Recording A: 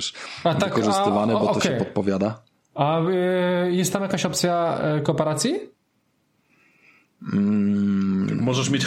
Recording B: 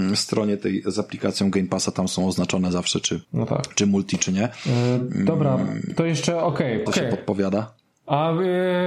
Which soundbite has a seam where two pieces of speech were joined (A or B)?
B